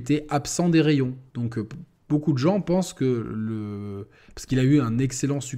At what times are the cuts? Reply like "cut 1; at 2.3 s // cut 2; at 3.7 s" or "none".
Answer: cut 1; at 1.3 s